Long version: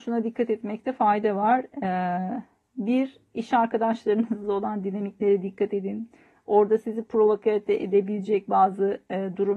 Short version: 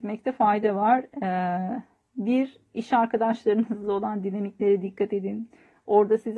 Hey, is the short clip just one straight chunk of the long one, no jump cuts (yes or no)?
yes